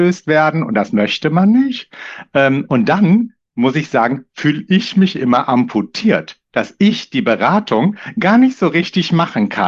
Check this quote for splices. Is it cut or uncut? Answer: uncut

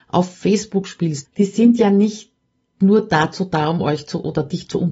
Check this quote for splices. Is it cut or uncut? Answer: cut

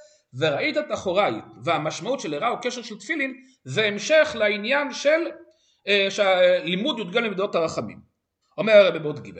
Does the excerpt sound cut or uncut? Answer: cut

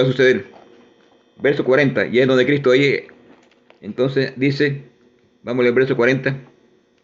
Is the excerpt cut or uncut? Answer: uncut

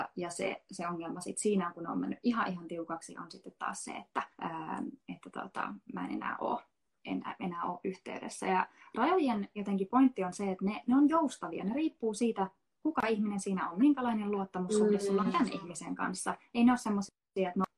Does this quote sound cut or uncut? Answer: cut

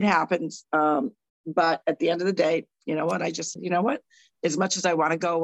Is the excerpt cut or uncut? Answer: uncut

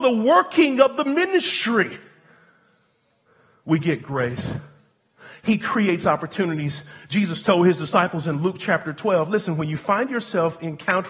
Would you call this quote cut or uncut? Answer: cut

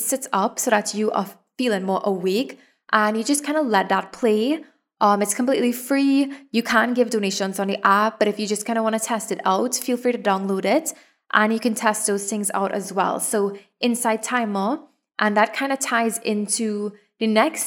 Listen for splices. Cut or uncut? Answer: uncut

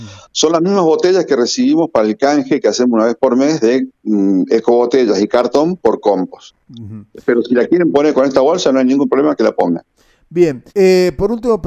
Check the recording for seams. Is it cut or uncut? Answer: cut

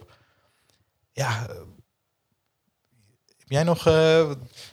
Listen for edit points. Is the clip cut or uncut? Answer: uncut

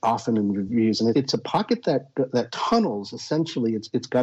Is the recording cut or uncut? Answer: cut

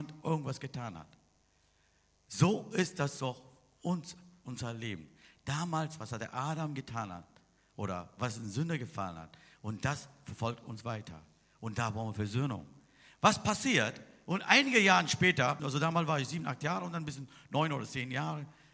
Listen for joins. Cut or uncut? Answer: cut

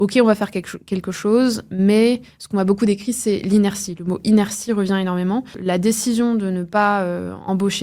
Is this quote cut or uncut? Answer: uncut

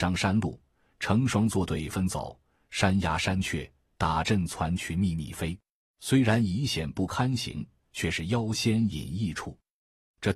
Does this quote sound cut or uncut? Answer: cut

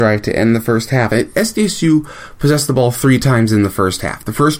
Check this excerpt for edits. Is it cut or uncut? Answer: uncut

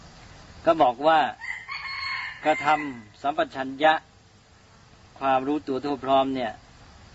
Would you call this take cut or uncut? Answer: uncut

